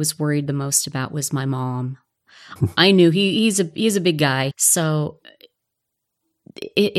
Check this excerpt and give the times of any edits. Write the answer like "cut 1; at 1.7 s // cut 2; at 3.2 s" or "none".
cut 1; at 2.6 s // cut 2; at 4.5 s